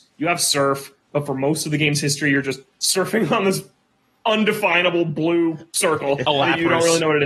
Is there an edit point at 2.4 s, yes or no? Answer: no